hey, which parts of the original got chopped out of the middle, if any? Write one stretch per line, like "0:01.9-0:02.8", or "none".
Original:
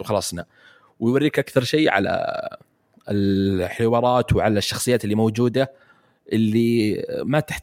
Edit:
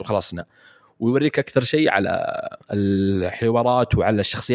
0:02.6-0:03.0

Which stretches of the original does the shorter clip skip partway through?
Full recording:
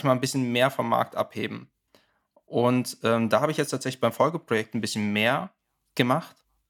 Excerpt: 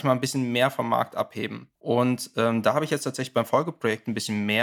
0:01.8-0:02.4

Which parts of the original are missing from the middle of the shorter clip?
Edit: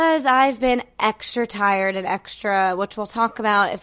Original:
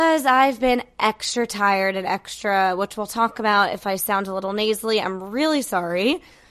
none

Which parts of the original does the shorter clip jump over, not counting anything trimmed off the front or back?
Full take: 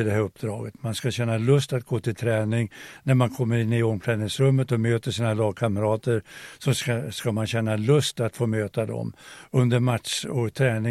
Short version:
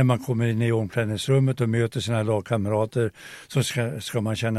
none

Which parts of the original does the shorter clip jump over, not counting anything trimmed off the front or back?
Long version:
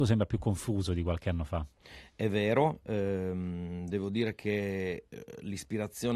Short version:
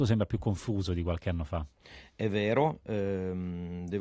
none

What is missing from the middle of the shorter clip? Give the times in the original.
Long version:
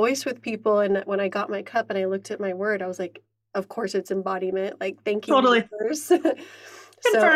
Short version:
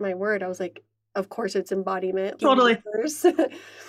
0:04.8-0:05.3

